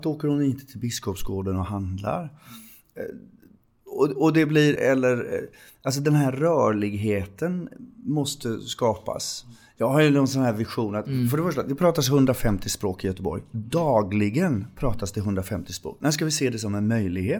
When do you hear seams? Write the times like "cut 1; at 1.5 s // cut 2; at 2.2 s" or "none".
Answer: cut 1; at 4.8 s